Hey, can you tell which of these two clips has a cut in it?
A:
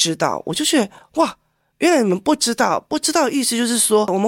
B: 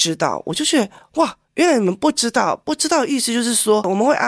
B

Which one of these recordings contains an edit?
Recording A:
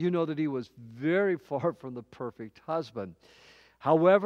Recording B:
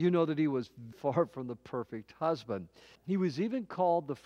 B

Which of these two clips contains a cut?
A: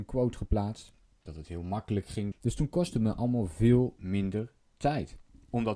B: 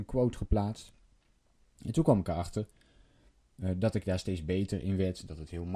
A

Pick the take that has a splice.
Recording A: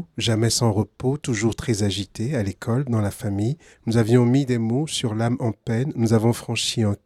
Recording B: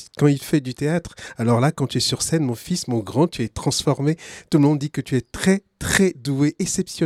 A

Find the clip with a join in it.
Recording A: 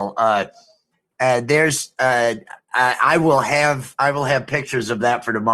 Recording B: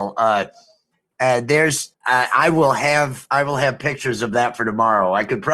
B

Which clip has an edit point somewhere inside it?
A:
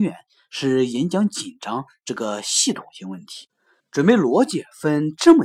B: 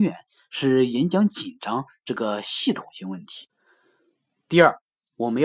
A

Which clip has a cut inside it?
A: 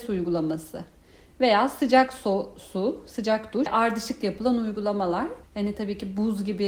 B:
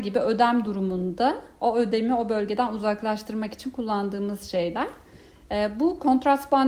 A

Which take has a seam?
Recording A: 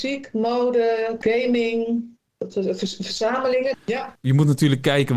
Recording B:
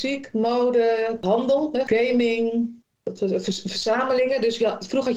A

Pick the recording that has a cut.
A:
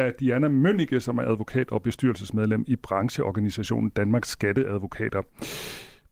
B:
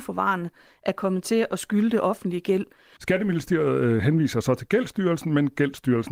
B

